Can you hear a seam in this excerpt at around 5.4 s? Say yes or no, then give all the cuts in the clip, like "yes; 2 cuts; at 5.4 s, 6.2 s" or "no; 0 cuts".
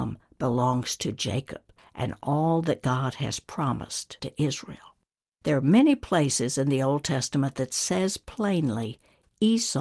yes; 1 cut; at 5.4 s